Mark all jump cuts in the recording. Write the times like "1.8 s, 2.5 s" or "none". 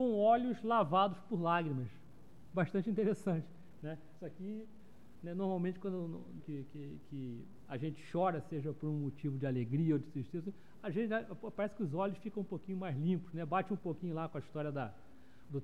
6.4 s